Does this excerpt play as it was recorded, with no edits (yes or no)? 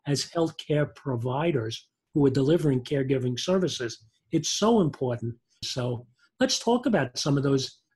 no